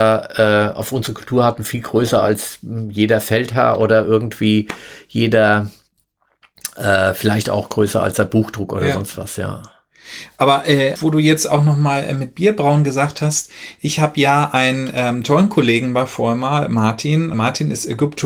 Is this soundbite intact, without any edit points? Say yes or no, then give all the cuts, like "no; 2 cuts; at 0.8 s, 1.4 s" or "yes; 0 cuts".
no; 2 cuts; at 11.0 s, 17.3 s